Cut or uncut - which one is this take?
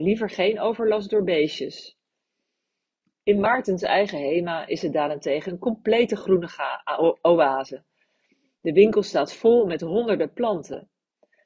uncut